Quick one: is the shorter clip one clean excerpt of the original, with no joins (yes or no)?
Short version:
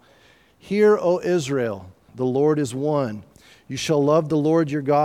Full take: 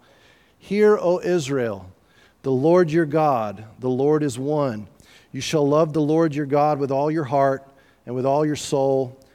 no